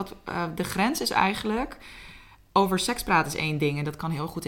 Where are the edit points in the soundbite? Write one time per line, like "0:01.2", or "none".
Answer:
none